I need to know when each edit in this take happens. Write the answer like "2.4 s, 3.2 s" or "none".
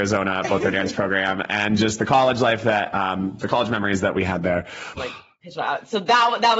5.0 s